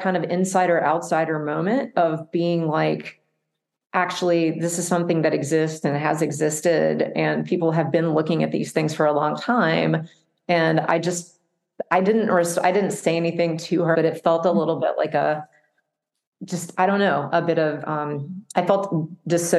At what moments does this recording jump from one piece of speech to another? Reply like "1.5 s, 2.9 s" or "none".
13.9 s